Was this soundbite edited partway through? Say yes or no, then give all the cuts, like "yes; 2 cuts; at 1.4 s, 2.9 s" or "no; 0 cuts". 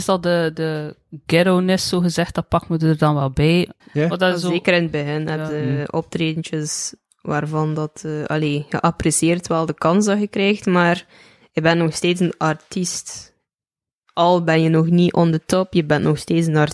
yes; 1 cut; at 3.8 s